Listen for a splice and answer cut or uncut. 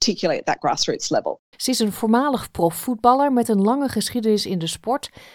cut